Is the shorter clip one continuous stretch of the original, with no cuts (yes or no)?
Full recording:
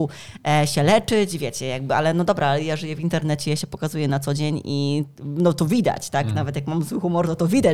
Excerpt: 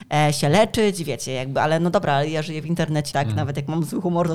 no